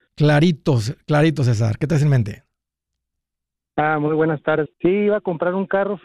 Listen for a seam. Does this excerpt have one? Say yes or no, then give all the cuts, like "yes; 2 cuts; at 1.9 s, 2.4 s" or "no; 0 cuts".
yes; 1 cut; at 4.7 s